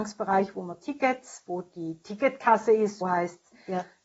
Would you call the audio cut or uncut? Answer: cut